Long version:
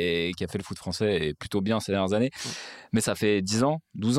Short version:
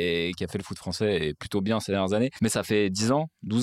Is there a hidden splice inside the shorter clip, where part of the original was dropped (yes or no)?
yes